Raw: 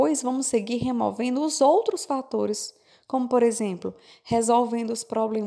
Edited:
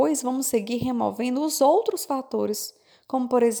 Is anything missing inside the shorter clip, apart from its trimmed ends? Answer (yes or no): no